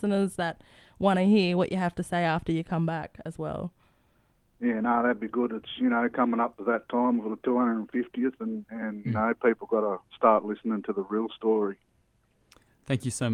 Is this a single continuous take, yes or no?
yes